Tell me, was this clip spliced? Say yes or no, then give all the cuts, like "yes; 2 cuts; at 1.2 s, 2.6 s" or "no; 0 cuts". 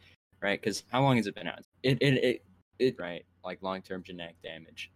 yes; 2 cuts; at 1.6 s, 3.0 s